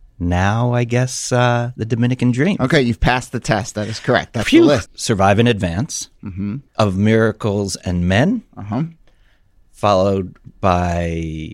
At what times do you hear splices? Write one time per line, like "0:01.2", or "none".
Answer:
0:04.9
0:06.7